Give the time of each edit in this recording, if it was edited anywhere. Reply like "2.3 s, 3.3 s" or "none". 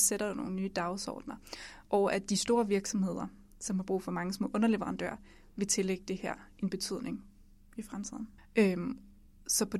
1.8 s, 8.4 s